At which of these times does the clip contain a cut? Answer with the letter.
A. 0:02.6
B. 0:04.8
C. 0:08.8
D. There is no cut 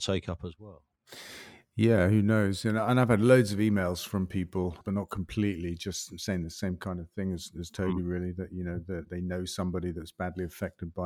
B